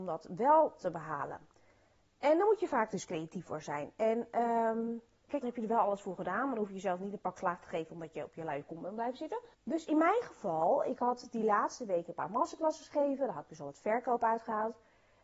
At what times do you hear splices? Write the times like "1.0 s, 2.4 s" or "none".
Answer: 5.4 s, 9.5 s